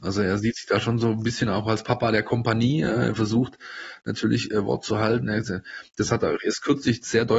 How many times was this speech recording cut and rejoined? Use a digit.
0